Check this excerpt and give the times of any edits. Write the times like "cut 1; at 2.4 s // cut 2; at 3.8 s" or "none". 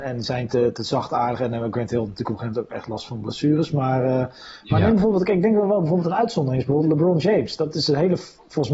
none

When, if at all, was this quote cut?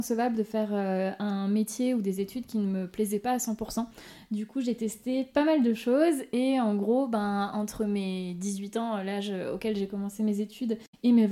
none

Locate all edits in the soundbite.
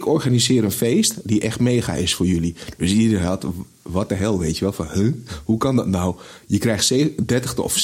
none

